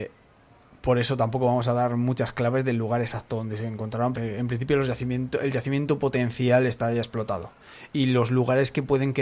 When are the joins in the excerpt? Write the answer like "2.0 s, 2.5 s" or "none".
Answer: 4.1 s

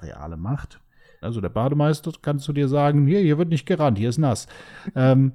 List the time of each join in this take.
1.2 s

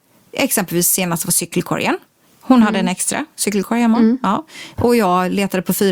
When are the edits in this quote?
none

